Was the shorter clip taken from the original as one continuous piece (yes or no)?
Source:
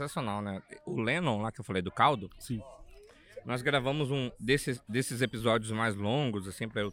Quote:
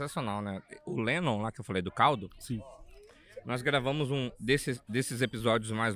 yes